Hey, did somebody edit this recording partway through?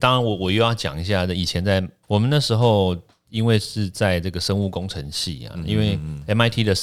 yes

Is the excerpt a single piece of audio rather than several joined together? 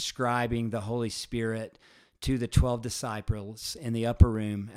yes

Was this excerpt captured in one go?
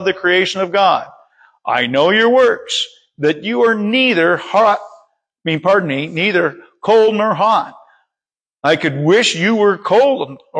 yes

